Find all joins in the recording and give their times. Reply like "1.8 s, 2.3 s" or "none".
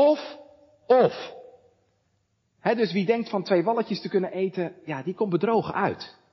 none